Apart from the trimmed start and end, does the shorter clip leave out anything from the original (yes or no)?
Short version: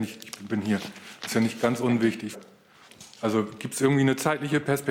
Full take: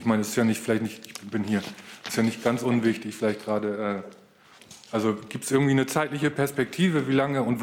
yes